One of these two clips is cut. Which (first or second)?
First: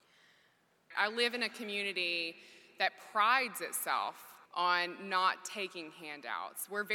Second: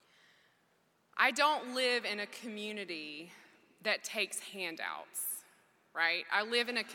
first